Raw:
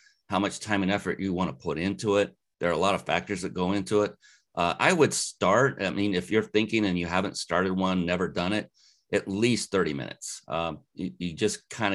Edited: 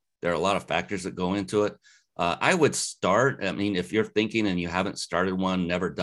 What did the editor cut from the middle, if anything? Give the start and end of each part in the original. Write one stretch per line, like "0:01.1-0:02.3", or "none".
none